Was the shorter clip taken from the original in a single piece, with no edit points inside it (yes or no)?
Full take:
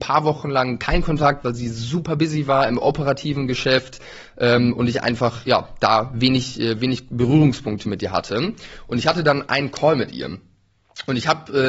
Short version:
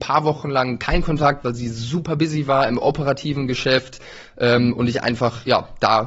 yes